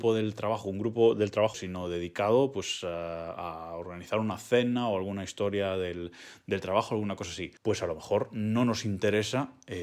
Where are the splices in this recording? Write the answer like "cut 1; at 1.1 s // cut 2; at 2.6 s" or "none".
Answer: cut 1; at 1.5 s // cut 2; at 7.6 s